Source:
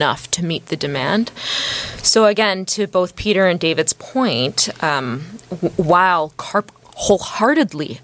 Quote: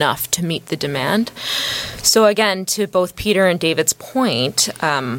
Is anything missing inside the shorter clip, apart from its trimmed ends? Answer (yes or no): no